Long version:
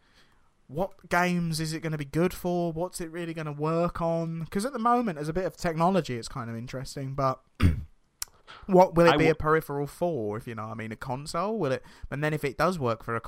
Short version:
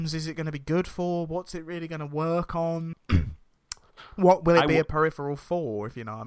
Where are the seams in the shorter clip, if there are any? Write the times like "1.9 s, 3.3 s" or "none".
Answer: 2.9 s